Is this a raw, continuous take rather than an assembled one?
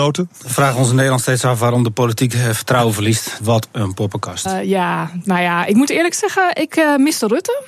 no; 2 cuts; at 3.4 s, 4.4 s

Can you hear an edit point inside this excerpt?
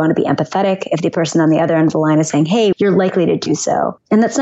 yes; 1 cut; at 2.7 s

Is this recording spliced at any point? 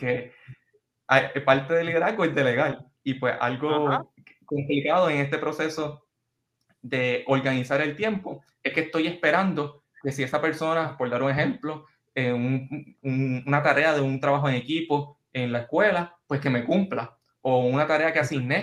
no; 0 cuts

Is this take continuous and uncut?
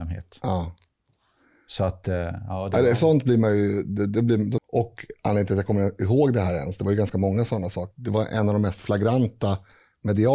no; 2 cuts; at 4.6 s, 7.9 s

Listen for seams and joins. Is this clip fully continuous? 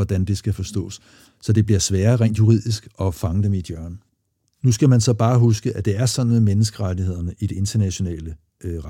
yes; 0 cuts

